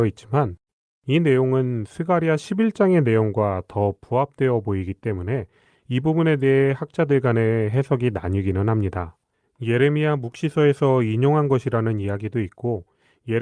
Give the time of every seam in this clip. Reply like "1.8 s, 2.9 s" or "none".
none